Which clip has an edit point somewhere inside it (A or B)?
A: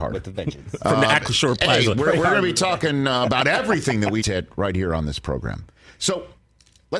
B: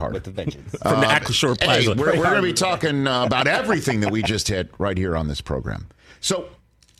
A